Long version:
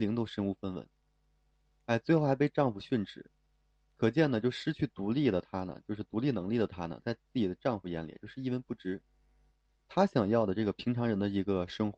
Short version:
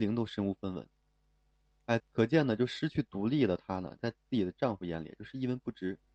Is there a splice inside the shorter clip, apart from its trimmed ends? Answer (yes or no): yes